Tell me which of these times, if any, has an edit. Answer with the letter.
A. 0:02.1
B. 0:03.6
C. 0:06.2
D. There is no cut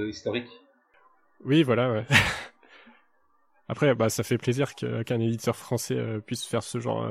D